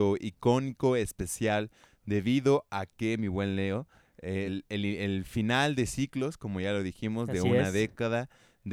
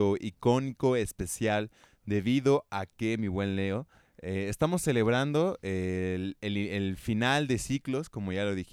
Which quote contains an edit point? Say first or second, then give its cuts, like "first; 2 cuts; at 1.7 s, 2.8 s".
first; 1 cut; at 4.5 s